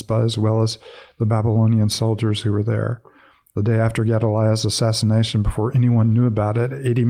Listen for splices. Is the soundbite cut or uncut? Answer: uncut